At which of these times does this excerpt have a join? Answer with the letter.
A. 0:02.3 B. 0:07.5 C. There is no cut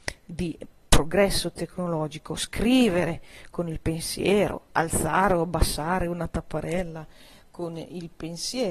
C